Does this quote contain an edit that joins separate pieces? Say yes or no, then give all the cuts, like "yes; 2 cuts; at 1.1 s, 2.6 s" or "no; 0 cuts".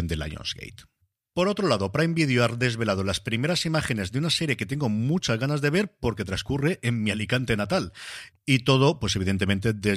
yes; 1 cut; at 8.3 s